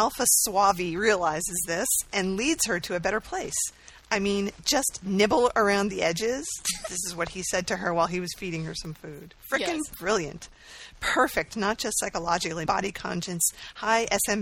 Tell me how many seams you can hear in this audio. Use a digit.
1